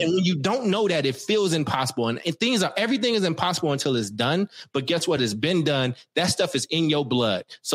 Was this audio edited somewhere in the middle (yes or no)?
no